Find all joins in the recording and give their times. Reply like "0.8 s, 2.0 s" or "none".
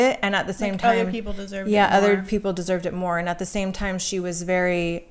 none